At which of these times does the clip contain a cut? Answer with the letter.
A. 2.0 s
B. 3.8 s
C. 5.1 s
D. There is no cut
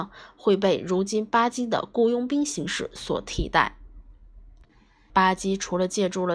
C